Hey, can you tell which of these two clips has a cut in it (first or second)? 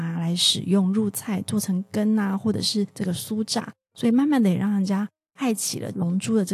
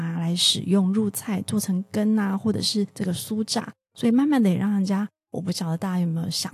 second